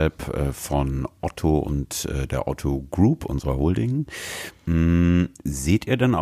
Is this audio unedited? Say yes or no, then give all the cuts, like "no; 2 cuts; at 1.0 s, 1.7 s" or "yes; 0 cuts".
yes; 0 cuts